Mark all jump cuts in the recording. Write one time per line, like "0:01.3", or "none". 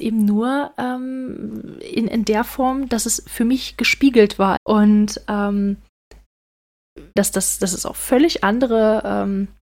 0:04.6
0:07.2